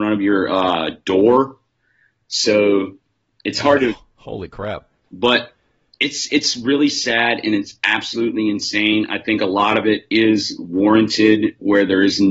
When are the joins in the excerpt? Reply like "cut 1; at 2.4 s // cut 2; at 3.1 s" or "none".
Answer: cut 1; at 5.0 s